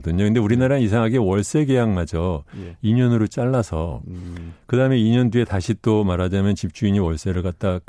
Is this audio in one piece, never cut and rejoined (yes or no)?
yes